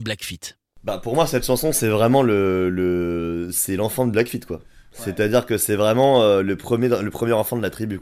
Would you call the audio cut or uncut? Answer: uncut